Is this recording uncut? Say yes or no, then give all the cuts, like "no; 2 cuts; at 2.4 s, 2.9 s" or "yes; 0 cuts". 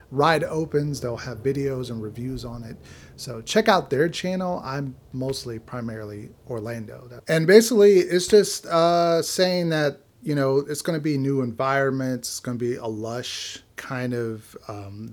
no; 2 cuts; at 7.2 s, 13.7 s